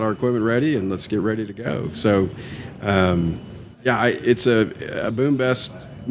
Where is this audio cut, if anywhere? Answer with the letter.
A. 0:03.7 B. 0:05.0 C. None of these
A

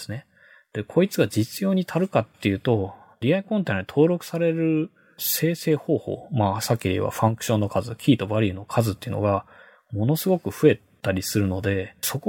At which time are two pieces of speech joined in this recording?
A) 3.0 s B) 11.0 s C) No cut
C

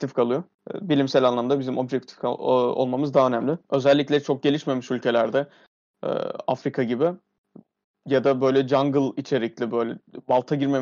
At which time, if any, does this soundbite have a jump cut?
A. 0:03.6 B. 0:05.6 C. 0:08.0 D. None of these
A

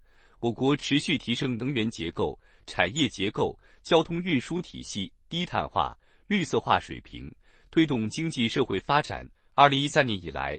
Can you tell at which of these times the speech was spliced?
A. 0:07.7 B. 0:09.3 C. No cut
B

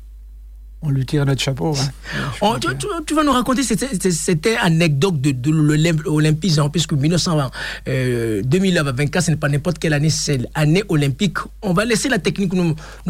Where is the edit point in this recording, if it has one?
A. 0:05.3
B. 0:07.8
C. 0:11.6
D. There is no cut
D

